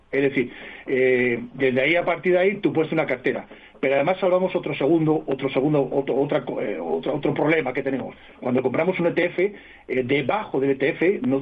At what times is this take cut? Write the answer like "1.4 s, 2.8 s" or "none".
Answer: 8.3 s